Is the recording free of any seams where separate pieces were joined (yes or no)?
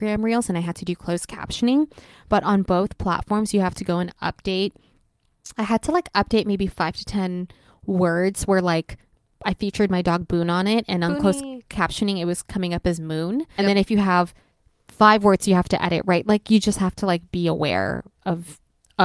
no